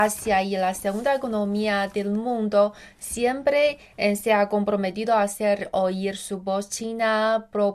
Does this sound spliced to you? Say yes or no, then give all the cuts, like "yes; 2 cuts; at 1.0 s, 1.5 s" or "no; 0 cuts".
no; 0 cuts